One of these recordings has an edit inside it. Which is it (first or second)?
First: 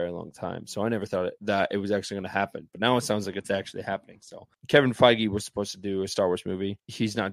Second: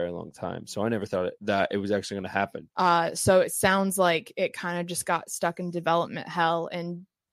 second